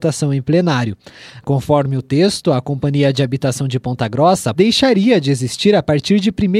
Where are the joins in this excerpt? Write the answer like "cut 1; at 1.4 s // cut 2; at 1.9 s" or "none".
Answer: cut 1; at 1.4 s // cut 2; at 4.5 s